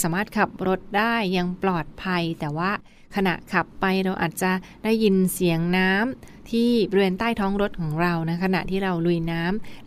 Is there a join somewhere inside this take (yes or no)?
no